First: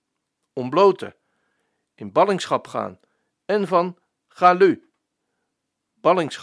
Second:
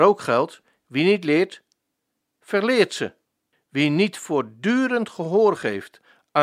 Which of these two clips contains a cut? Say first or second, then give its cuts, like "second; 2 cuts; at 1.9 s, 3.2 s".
second; 1 cut; at 3.5 s